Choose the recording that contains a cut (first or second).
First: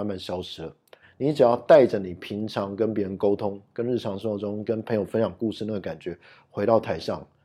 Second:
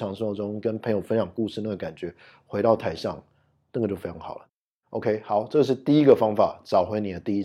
first